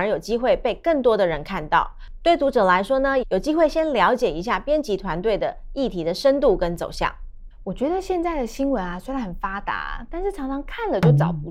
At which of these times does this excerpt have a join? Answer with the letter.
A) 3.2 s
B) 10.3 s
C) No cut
A